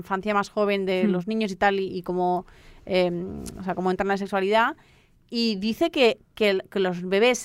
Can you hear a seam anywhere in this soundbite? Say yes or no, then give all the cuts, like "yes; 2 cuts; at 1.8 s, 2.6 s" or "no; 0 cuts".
no; 0 cuts